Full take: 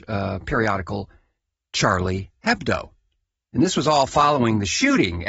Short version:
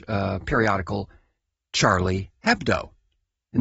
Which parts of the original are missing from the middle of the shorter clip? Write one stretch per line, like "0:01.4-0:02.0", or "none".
none